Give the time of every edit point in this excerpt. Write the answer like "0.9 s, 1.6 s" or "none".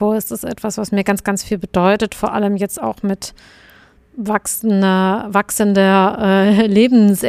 none